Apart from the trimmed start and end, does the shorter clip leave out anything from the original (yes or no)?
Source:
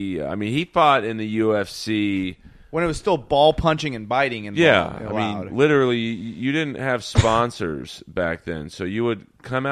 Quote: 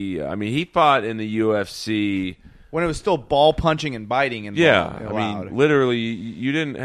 no